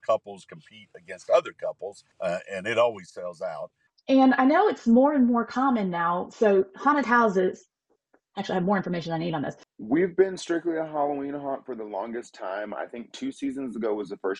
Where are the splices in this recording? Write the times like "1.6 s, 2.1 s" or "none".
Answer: 2.1 s, 9.6 s